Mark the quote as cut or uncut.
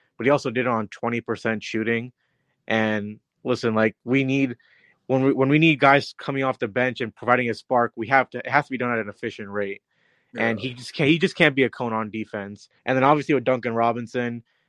cut